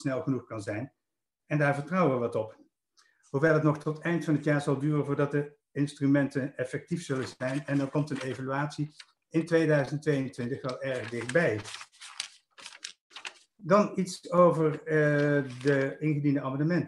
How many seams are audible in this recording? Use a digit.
0